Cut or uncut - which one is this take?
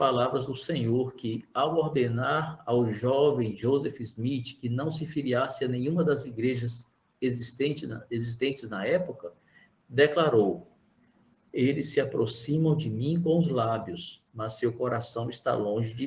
uncut